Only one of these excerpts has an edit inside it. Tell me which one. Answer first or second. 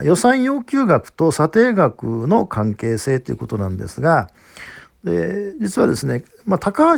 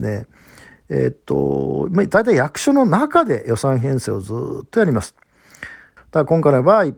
second